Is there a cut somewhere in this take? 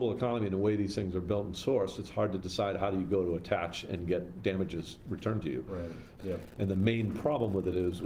yes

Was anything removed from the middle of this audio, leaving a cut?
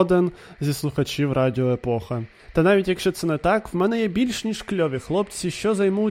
yes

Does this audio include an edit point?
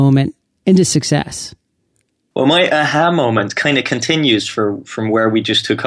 no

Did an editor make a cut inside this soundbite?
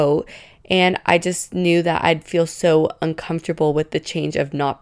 no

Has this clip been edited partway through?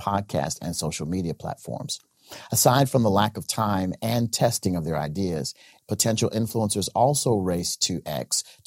yes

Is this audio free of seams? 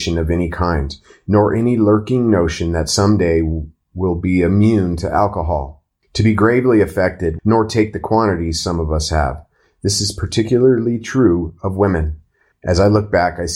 no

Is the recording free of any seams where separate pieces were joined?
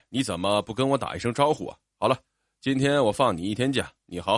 yes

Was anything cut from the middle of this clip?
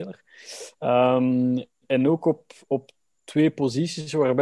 no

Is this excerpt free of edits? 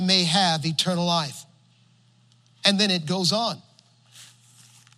yes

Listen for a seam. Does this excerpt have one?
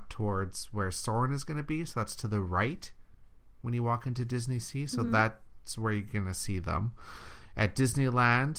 no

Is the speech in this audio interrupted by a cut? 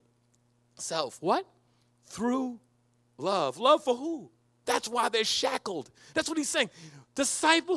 yes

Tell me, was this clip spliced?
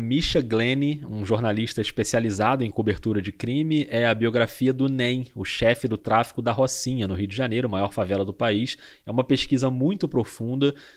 no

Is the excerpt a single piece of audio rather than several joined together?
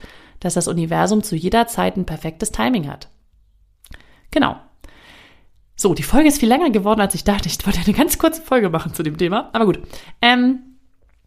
yes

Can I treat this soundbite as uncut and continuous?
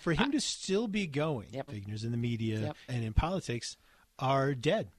no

